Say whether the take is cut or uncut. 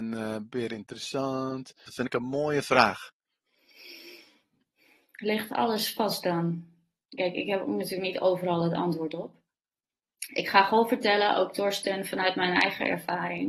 cut